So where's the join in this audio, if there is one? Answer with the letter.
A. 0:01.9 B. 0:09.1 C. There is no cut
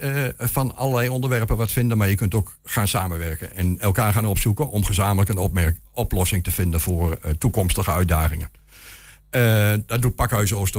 C